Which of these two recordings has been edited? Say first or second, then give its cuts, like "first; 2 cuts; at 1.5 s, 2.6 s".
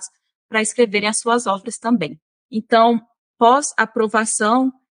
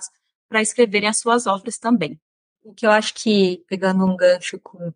first; 1 cut; at 2.4 s